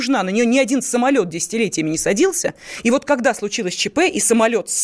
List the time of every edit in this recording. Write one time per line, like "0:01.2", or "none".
none